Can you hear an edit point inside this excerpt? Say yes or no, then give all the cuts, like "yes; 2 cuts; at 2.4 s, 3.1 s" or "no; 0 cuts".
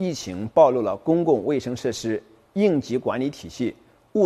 no; 0 cuts